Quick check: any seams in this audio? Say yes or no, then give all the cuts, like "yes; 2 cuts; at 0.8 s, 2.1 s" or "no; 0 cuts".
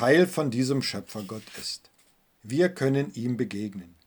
yes; 1 cut; at 2.3 s